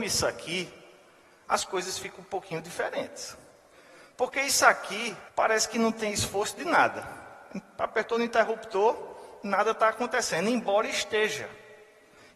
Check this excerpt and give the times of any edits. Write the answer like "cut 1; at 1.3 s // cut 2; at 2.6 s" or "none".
cut 1; at 5.3 s